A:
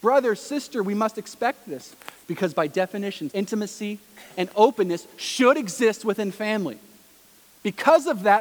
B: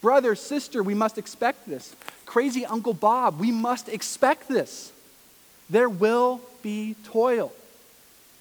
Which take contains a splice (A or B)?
A